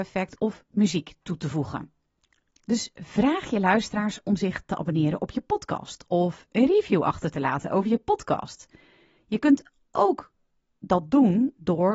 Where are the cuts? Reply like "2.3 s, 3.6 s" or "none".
2.5 s